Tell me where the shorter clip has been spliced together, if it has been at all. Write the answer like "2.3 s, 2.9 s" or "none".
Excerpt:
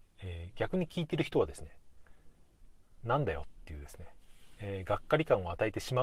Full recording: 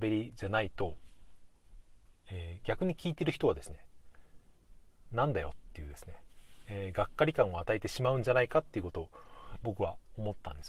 none